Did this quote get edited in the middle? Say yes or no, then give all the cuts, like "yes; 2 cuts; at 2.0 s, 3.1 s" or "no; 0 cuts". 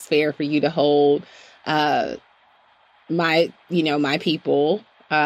no; 0 cuts